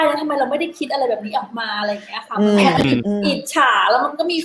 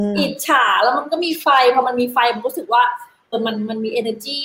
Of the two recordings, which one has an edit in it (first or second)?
second